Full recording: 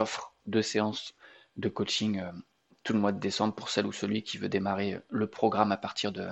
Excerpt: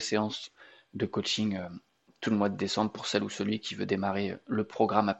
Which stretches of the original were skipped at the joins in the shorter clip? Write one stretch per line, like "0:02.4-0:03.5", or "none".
none